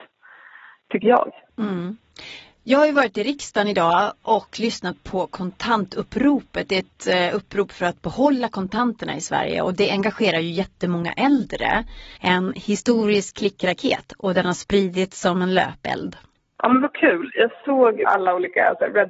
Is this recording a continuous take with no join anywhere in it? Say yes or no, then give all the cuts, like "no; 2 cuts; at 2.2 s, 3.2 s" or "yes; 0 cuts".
no; 1 cut; at 12.2 s